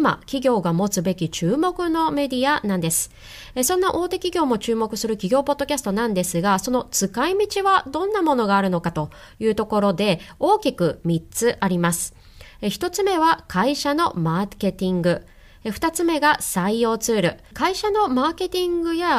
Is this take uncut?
no; 1 cut; at 17.5 s

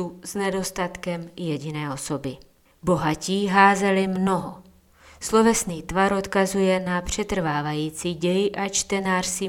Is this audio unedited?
no; 1 cut; at 2.7 s

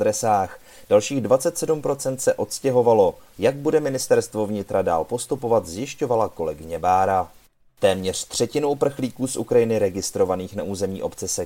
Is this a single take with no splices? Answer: no; 2 cuts; at 3.3 s, 7.7 s

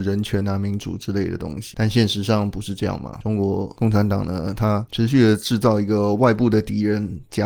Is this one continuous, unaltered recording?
yes; 0 cuts

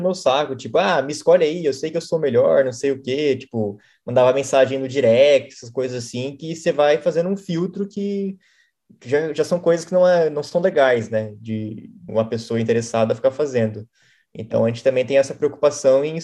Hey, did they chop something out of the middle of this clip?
yes; 1 cut; at 12.1 s

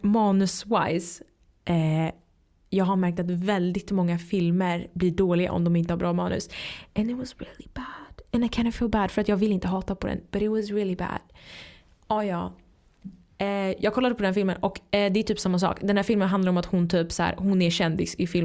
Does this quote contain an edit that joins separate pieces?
no; 0 cuts

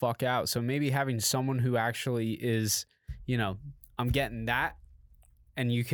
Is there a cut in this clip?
no; 0 cuts

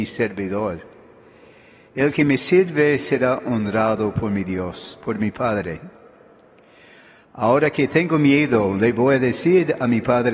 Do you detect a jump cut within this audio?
no; 0 cuts

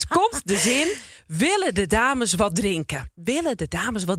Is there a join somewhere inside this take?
yes; 1 cut; at 3.2 s

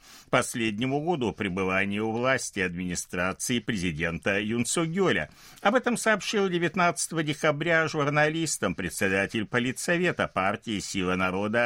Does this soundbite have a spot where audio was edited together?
no; 0 cuts

